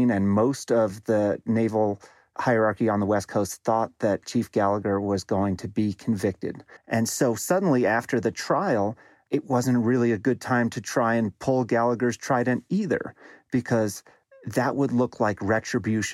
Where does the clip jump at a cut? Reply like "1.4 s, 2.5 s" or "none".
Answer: 6.8 s